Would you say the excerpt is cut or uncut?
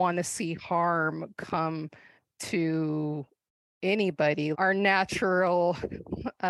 cut